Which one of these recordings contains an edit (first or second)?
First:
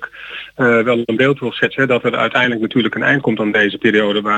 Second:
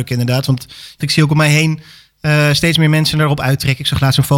second